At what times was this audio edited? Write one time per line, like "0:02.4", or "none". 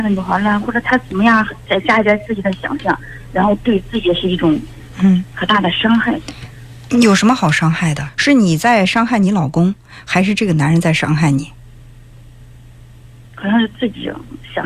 0:01.7
0:08.1